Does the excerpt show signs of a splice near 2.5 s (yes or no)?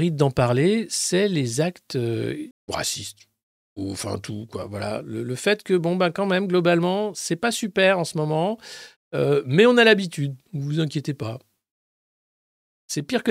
yes